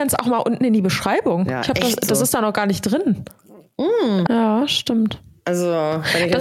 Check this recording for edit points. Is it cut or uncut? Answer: cut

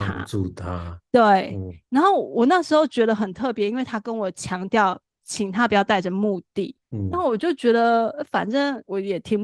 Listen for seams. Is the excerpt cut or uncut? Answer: uncut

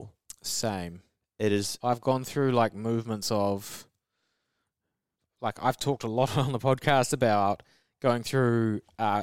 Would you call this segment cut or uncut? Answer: uncut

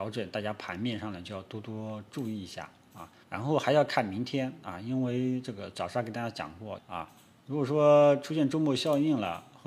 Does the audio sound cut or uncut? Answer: cut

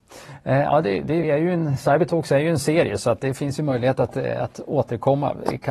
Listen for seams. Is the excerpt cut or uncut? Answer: cut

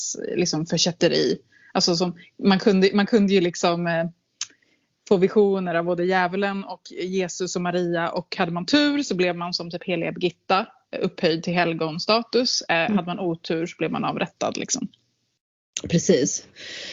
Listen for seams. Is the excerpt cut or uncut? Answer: uncut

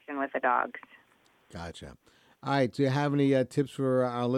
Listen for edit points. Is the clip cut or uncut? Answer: uncut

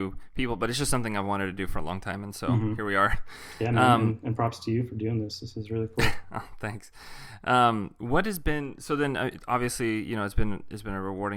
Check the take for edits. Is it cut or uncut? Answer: uncut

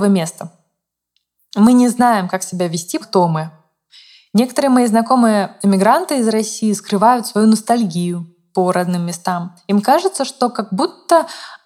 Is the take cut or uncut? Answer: cut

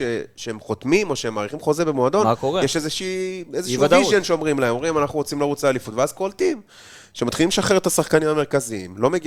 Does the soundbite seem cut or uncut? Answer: uncut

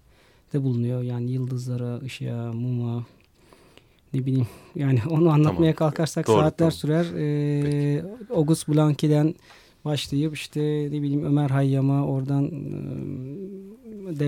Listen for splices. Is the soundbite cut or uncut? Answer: uncut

